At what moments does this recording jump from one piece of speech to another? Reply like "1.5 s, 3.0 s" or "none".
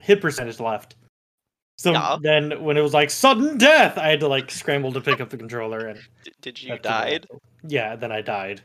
none